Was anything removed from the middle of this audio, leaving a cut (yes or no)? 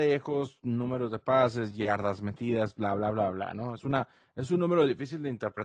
no